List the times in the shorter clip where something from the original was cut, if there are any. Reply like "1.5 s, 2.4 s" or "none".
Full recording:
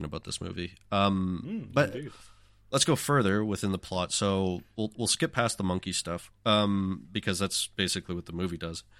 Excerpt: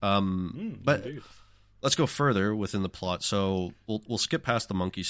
none